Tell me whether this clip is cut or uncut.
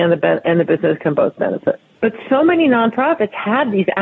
cut